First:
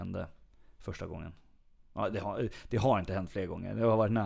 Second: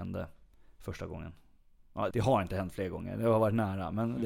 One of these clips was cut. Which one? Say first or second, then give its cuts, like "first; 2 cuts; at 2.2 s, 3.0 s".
second; 1 cut; at 2.1 s